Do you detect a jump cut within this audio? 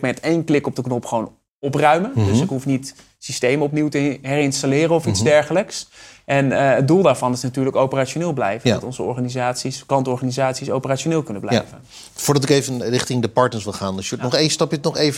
no; 0 cuts

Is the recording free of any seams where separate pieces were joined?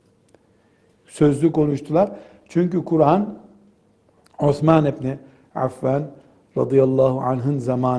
yes; 0 cuts

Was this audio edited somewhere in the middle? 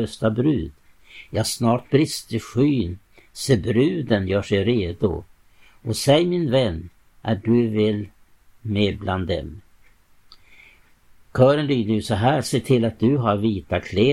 no; 0 cuts

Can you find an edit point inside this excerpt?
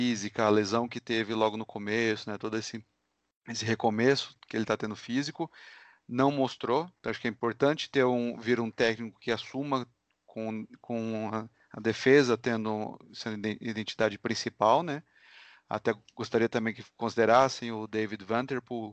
no; 0 cuts

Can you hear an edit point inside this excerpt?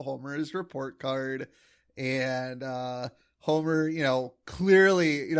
no; 0 cuts

